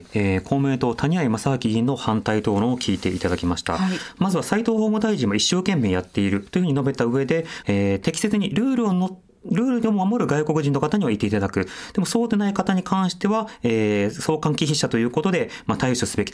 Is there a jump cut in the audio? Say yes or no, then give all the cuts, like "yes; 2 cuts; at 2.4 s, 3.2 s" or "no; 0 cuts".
yes; 1 cut; at 7.6 s